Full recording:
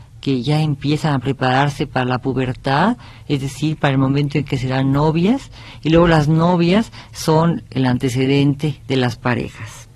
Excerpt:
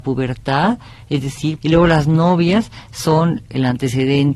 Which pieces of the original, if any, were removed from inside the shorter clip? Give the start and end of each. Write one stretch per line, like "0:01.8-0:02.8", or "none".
0:03.8-0:05.8

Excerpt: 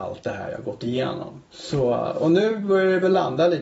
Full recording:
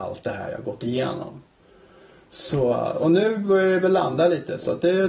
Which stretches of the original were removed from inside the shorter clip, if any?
0:01.5-0:02.3

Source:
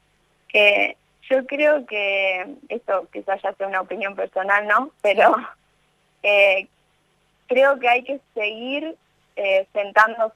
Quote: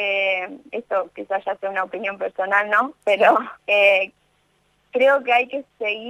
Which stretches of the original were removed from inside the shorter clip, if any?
0:05.6-0:06.1

